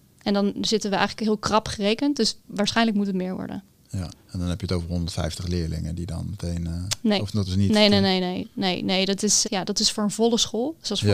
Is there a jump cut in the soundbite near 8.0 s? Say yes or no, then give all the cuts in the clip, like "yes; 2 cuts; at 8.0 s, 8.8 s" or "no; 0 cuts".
no; 2 cuts; at 4.1 s, 9.4 s